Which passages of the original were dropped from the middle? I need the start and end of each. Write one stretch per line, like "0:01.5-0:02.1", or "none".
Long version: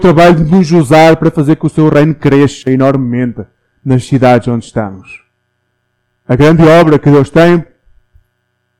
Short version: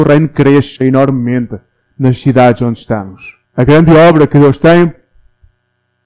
0:05.3-0:06.2